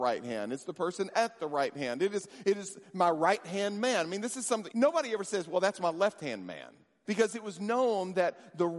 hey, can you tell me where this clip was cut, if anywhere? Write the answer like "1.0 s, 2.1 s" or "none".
4.7 s, 7.0 s